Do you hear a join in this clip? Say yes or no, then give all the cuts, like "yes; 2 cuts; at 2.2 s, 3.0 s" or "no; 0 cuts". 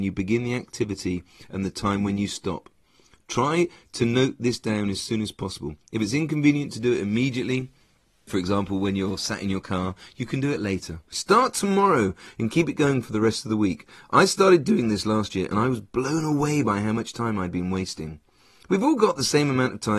yes; 2 cuts; at 8.3 s, 11.1 s